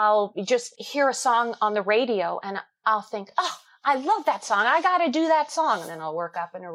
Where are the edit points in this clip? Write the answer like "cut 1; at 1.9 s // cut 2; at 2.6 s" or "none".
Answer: none